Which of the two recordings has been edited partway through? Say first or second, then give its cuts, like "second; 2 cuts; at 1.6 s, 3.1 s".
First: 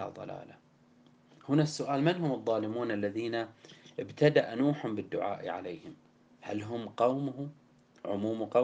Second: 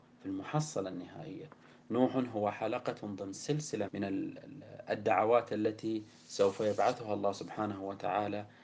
second; 1 cut; at 3.9 s